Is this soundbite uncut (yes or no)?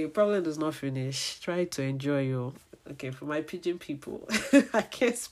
yes